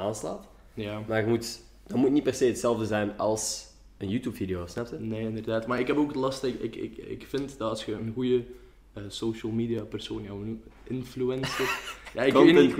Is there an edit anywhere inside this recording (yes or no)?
no